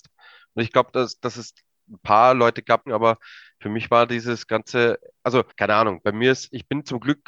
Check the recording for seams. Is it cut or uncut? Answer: cut